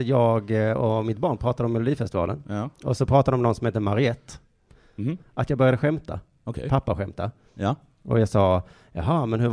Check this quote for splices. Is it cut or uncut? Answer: cut